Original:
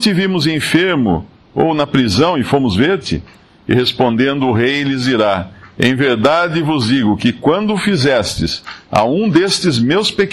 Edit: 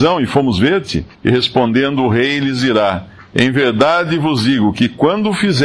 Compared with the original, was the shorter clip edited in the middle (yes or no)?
yes